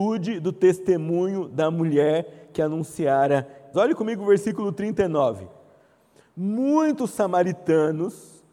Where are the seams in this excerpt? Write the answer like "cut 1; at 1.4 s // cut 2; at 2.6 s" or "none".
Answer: cut 1; at 3.7 s